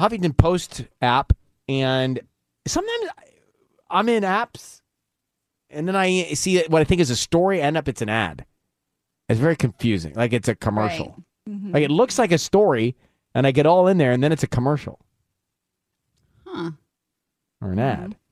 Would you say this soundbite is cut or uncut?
uncut